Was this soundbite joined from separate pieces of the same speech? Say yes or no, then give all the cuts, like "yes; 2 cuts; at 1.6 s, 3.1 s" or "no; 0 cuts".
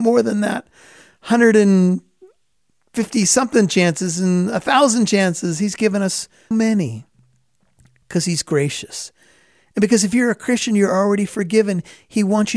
yes; 1 cut; at 6.5 s